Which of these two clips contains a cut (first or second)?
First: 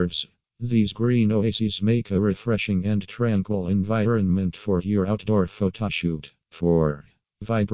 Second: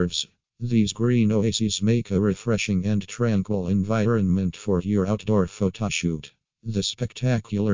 first